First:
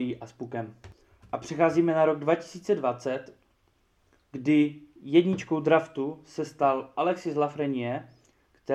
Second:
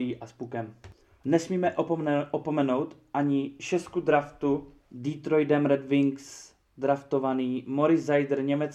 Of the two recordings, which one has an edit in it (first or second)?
second